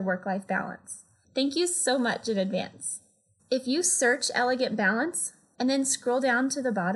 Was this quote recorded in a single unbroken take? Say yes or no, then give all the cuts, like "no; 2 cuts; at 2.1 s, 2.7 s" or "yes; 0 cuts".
no; 3 cuts; at 1.2 s, 3.4 s, 5.5 s